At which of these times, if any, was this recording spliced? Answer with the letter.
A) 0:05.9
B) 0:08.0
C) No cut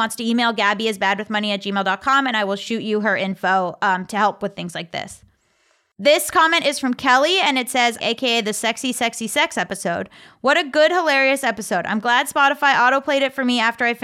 B